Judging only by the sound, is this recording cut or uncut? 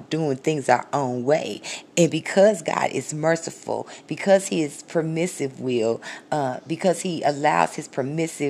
uncut